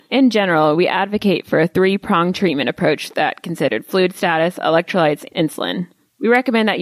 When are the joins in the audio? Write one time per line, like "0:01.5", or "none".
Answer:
0:05.3